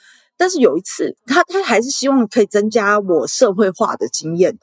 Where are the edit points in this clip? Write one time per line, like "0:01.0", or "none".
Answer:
0:01.2